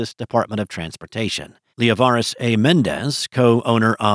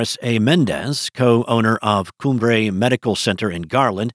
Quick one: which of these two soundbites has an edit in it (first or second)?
first